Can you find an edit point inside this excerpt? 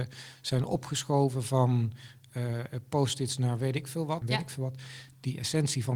yes; 1 cut; at 4.2 s

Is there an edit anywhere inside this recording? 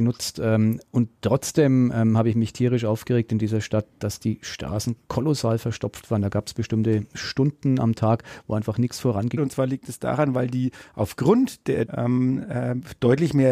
yes; 2 cuts; at 9.4 s, 11.9 s

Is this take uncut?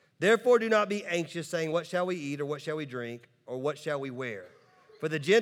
yes; 0 cuts

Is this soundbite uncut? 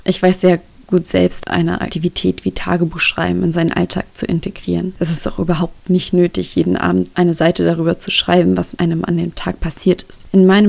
no; 1 cut; at 1.4 s

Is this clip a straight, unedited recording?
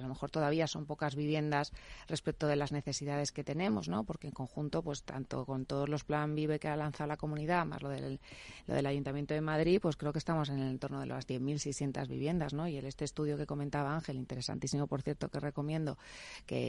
yes; 0 cuts

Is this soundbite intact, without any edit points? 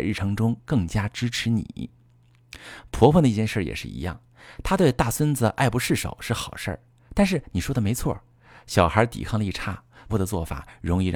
no; 1 cut; at 10.1 s

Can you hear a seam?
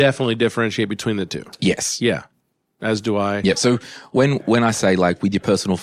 no; 0 cuts

